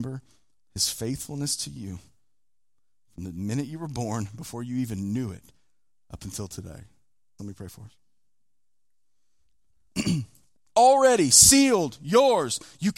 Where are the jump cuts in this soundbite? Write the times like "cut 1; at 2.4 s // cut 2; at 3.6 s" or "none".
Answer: cut 1; at 7.4 s // cut 2; at 10.6 s